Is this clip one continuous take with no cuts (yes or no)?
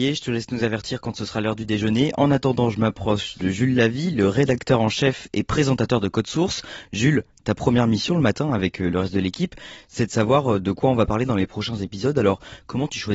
yes